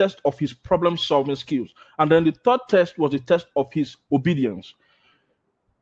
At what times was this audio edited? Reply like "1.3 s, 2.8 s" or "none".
none